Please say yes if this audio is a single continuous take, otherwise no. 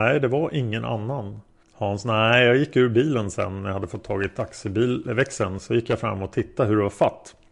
no